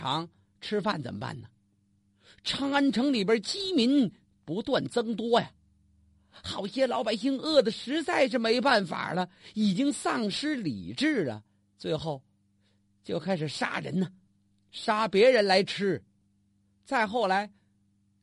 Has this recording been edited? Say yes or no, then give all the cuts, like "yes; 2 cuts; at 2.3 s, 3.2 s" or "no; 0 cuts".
no; 0 cuts